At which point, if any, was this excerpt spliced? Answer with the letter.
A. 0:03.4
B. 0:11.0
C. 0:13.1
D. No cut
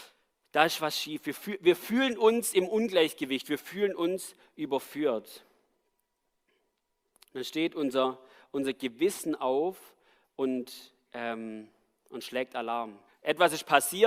C